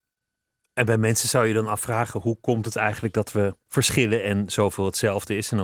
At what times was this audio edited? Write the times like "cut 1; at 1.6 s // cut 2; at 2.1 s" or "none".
cut 1; at 3.6 s